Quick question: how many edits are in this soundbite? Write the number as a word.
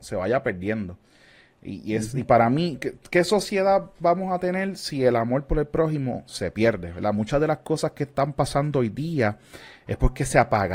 zero